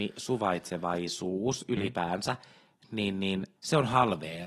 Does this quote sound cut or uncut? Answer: cut